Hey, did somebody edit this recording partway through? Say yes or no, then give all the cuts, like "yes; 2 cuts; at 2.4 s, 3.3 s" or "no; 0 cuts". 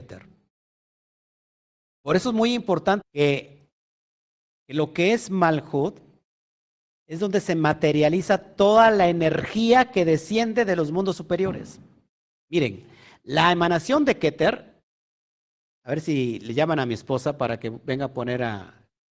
yes; 1 cut; at 3.0 s